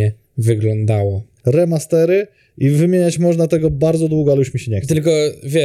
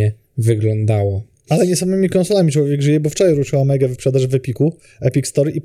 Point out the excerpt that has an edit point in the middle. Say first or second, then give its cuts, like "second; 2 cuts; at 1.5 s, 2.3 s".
first; 1 cut; at 1.4 s